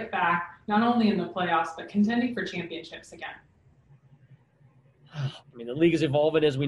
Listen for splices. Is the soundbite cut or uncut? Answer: cut